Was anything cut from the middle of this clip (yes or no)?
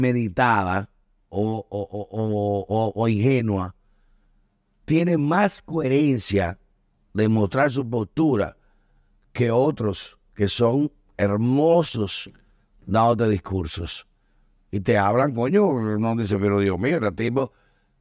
no